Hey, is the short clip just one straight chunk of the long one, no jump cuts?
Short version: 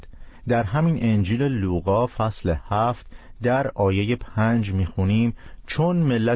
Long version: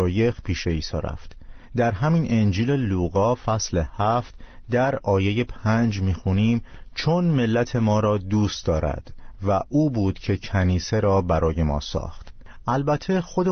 yes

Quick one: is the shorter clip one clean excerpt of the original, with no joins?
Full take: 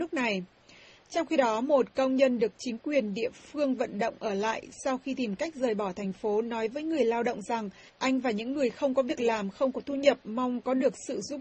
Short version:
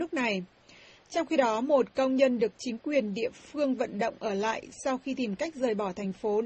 yes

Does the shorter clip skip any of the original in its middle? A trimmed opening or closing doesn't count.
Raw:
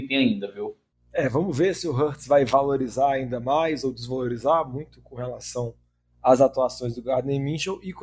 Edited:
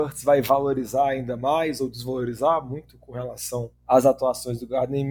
yes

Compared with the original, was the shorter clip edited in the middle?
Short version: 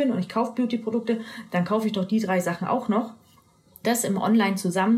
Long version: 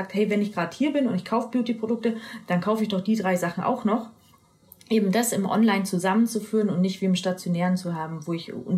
yes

